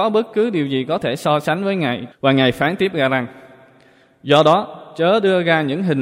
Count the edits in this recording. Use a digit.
1